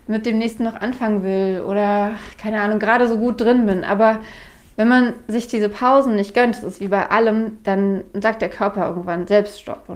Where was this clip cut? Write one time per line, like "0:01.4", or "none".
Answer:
none